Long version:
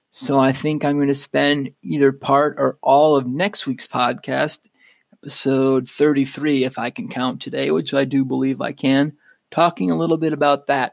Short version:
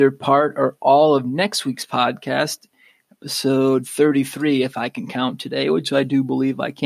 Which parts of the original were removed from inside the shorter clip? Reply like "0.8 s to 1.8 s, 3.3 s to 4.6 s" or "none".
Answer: none

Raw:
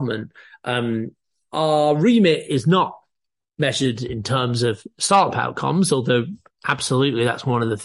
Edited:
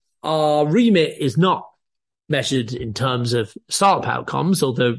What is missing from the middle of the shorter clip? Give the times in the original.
none

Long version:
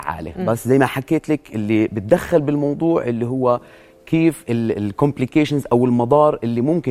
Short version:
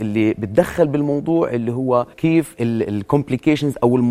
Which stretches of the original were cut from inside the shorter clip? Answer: 3.7 s to 4.0 s

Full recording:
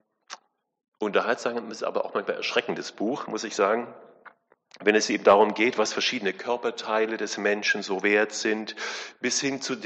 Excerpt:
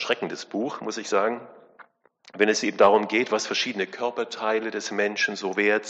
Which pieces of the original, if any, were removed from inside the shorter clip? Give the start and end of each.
none

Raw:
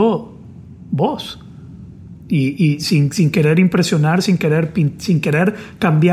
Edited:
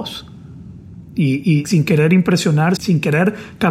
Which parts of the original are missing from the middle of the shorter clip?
2.8 s to 3.1 s, 4.2 s to 5.0 s

